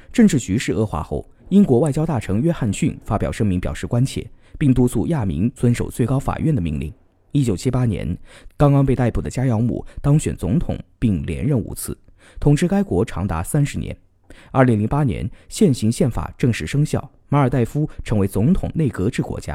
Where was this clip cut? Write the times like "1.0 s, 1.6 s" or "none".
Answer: none